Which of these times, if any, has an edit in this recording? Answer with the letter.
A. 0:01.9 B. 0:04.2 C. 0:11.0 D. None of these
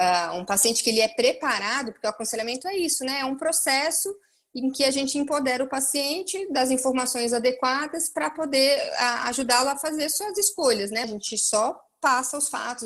C